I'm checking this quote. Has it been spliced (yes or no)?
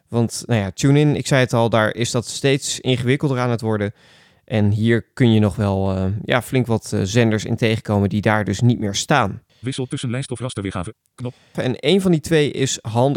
yes